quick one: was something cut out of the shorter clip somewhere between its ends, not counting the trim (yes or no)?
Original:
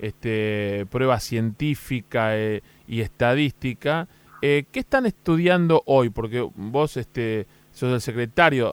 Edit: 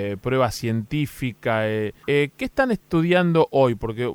yes